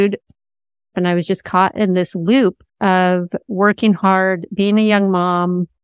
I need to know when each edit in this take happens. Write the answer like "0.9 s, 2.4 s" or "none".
0.9 s, 2.7 s